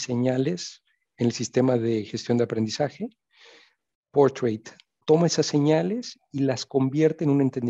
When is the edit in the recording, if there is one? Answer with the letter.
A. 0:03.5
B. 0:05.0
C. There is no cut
B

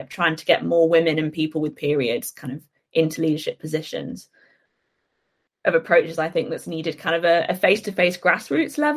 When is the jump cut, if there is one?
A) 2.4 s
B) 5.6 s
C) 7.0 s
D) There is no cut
B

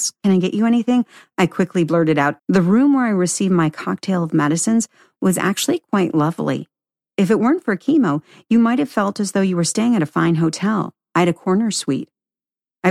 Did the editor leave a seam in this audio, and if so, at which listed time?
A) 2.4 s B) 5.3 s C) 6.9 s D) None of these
A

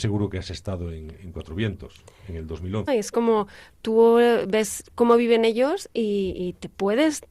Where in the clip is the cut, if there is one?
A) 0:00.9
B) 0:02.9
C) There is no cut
B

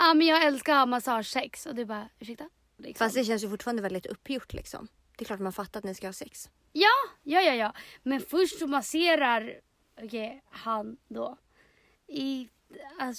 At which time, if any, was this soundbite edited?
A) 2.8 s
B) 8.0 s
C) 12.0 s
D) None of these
A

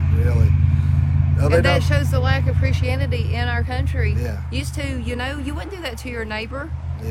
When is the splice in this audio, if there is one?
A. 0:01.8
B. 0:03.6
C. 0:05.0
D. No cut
D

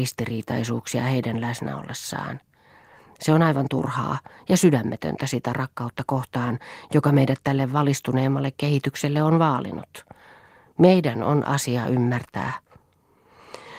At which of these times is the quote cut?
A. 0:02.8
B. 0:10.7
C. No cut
C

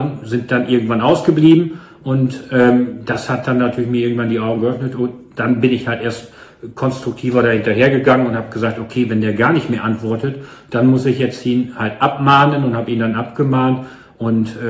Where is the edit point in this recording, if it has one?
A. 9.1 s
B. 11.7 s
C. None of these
C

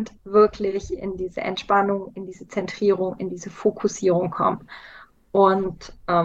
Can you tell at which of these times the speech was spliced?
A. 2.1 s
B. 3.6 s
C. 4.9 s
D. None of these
D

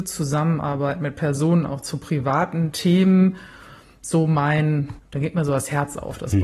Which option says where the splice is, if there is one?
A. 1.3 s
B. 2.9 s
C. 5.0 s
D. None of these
C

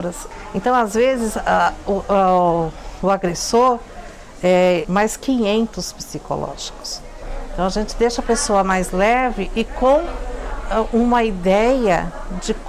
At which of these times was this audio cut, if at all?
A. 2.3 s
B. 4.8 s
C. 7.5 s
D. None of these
B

